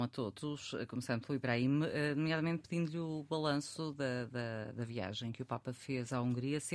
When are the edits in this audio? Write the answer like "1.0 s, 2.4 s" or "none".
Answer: none